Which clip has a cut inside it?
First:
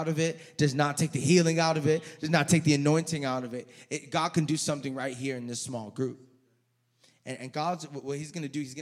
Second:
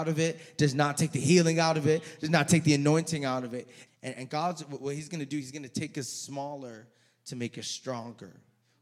second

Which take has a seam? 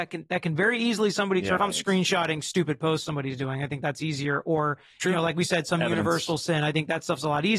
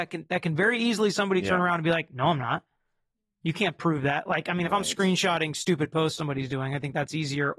first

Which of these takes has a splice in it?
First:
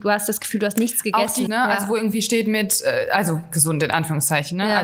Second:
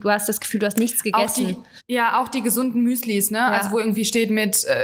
first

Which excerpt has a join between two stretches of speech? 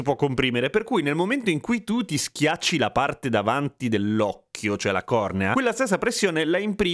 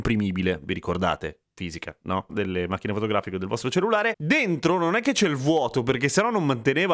second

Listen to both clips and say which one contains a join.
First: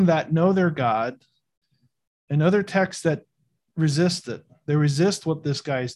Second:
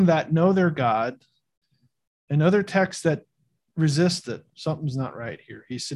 second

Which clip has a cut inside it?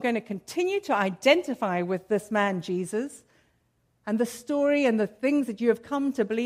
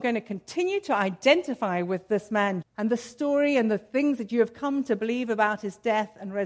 second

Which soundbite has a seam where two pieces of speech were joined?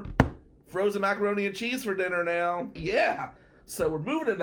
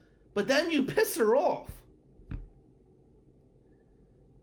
first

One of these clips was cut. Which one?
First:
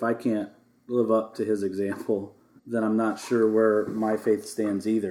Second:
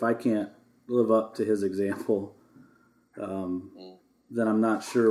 first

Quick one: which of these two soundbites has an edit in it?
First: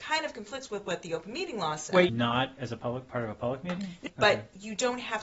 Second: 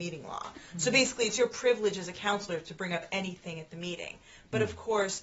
first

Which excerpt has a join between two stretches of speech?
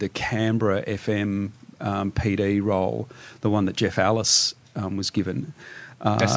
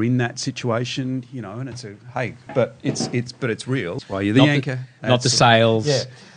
second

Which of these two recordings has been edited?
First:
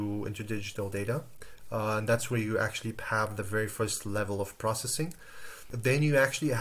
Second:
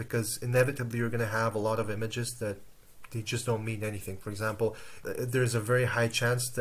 second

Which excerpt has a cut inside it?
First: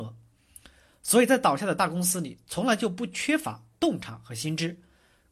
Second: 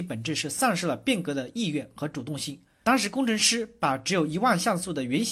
second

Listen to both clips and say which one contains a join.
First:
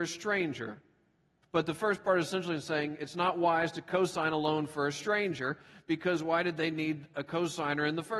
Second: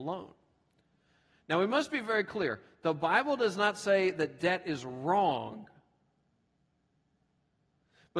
first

